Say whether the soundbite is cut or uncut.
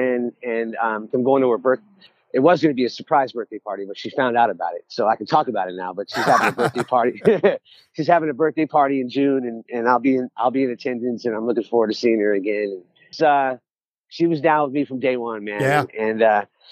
cut